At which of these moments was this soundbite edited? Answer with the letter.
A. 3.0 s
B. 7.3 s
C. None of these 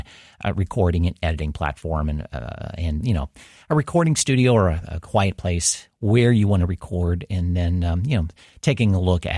A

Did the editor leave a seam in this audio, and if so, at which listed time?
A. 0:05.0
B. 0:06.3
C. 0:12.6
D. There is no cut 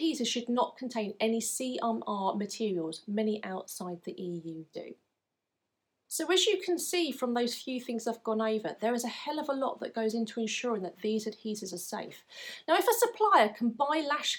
D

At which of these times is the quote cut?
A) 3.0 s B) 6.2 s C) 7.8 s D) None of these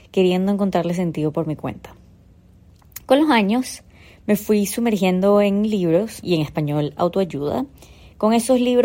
B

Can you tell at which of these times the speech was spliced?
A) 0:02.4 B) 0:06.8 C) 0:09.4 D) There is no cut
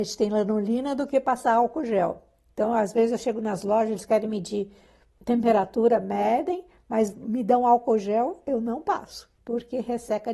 C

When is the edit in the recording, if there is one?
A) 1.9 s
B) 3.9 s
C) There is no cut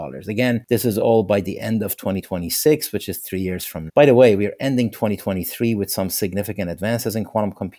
B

